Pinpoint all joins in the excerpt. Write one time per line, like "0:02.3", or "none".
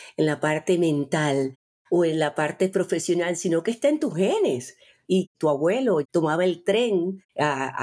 0:05.0